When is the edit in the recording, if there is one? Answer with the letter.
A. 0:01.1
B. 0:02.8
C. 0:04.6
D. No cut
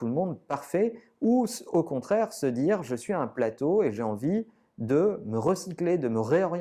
D